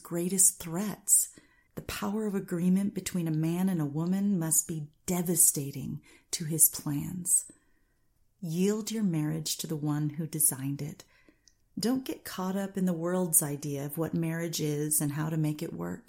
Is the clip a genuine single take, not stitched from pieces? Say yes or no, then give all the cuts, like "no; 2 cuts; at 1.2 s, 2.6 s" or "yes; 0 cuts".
no; 1 cut; at 1.7 s